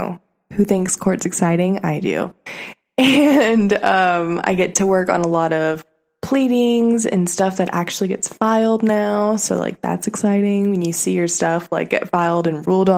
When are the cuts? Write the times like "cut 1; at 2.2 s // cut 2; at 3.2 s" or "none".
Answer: none